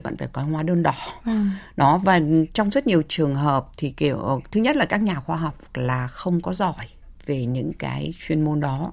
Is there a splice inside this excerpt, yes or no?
no